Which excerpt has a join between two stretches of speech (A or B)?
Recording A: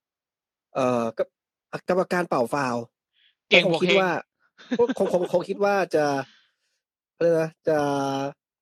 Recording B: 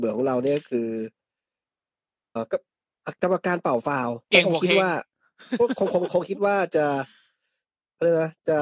B